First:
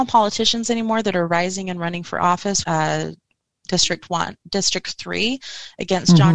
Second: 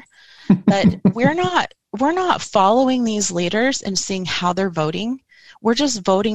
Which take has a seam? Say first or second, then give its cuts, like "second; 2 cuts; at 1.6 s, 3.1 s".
first; 1 cut; at 2.6 s